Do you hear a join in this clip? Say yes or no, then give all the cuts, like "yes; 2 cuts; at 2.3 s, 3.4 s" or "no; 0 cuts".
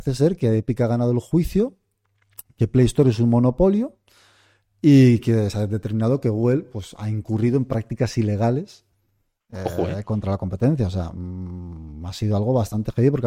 no; 0 cuts